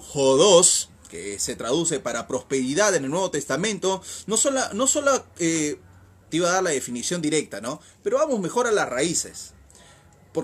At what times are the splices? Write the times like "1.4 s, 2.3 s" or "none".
6.3 s